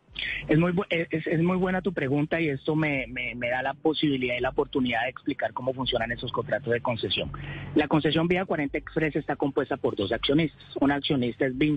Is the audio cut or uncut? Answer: uncut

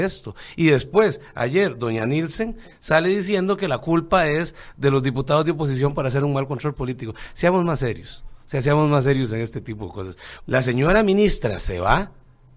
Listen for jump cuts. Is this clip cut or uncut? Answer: cut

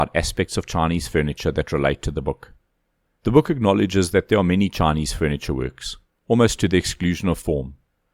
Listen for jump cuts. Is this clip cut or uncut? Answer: cut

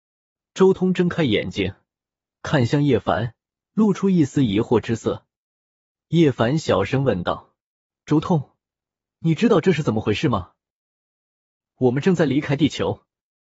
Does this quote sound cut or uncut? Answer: uncut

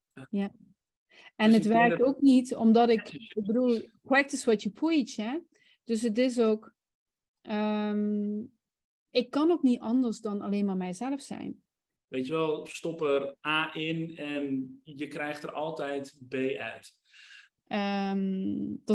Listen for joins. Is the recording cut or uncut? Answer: cut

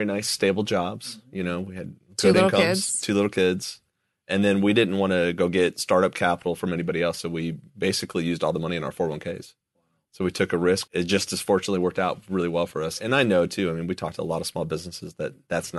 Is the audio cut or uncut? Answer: cut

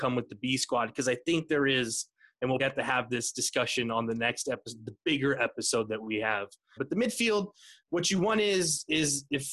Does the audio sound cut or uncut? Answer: cut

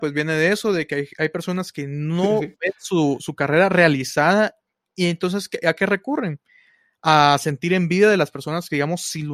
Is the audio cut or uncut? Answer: uncut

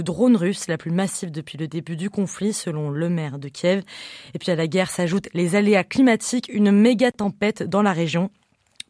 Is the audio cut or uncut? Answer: uncut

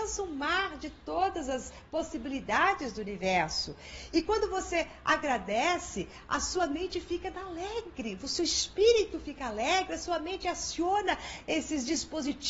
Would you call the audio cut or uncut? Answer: uncut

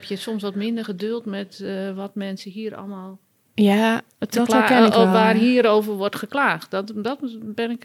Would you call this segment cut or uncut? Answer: uncut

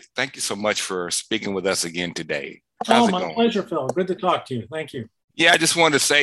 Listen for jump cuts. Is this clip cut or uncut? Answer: uncut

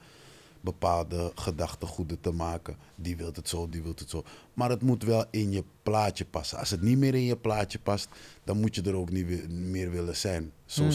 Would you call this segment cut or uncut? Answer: cut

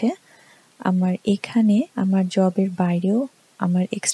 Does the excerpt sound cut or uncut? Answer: cut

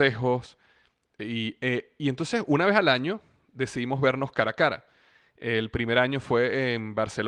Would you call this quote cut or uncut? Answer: uncut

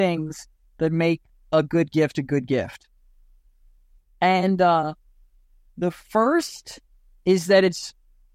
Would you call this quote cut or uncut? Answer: uncut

